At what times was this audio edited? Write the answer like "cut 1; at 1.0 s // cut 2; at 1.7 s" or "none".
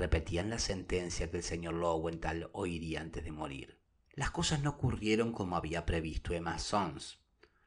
none